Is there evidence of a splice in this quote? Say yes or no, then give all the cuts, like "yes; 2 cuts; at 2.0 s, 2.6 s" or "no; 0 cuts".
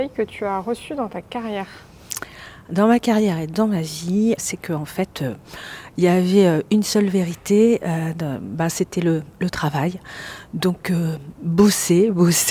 yes; 1 cut; at 4.4 s